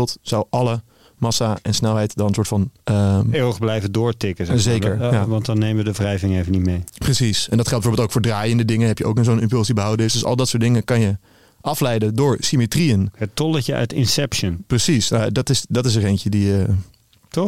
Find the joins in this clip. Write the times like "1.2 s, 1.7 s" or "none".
2.8 s